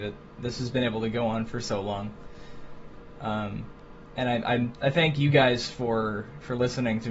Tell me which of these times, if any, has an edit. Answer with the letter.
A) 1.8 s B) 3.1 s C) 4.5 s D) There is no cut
D